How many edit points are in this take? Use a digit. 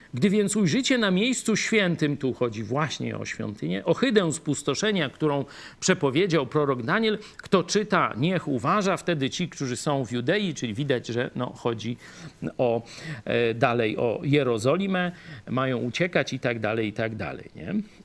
0